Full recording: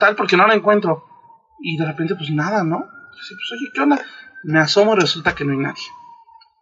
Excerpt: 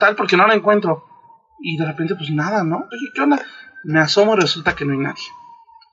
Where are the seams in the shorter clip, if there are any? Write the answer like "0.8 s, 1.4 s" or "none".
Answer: 2.9 s